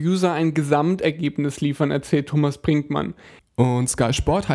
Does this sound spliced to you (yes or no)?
yes